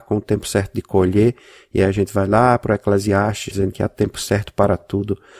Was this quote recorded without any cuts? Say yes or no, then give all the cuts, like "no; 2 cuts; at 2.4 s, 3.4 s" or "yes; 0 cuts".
no; 1 cut; at 3.5 s